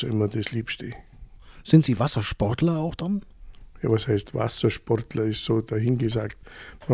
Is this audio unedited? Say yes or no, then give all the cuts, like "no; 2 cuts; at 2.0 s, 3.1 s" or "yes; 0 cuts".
yes; 0 cuts